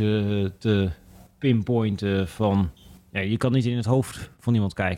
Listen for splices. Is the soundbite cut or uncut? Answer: uncut